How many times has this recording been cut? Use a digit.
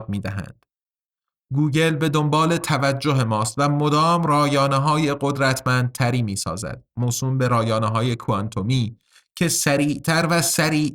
0